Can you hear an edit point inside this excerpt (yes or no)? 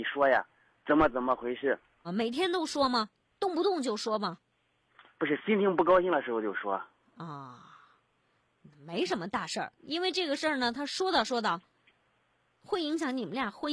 yes